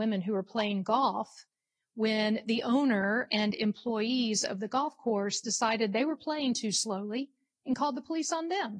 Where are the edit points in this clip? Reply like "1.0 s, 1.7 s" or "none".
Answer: none